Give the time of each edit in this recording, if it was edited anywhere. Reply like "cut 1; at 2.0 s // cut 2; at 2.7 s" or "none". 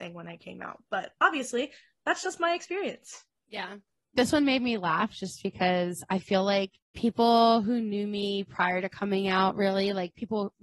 none